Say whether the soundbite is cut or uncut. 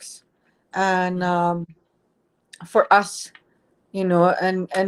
uncut